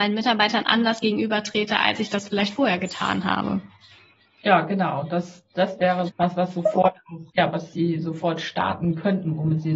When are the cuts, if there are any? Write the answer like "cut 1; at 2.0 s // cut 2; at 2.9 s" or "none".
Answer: cut 1; at 6.1 s // cut 2; at 7.3 s